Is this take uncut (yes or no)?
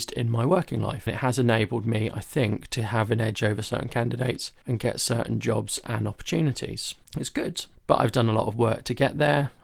yes